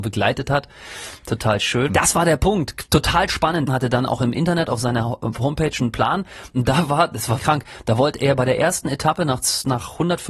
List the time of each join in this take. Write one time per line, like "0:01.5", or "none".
0:01.9
0:03.7
0:07.4